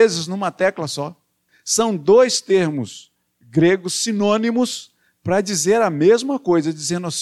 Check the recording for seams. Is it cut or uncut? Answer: cut